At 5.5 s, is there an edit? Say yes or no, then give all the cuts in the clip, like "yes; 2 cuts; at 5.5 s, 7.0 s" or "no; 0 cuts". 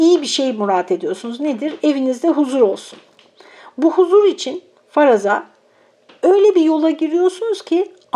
no; 0 cuts